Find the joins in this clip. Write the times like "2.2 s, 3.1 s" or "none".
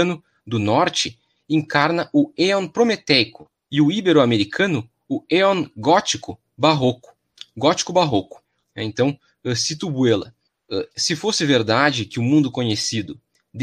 8.6 s, 10.9 s